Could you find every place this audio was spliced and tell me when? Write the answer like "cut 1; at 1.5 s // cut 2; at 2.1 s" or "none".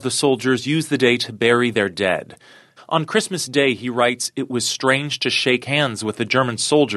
cut 1; at 2.8 s